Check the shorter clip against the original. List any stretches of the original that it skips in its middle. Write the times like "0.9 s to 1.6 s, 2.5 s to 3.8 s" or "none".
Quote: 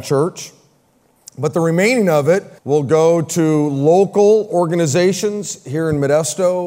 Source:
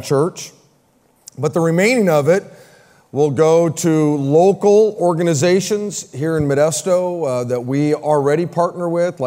2.6 s to 3.1 s